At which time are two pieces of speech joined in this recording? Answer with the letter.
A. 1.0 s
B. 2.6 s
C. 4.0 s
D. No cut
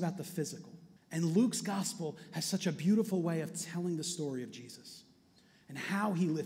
A